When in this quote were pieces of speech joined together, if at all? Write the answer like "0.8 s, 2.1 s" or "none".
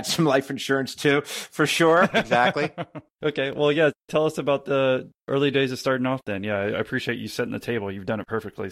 none